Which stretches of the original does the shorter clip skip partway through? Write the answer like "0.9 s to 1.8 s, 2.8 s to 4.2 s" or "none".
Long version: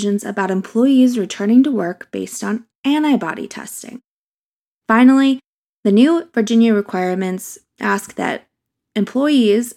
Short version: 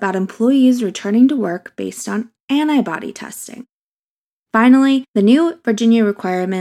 5.4 s to 5.8 s